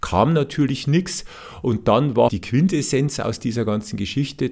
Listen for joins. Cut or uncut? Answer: cut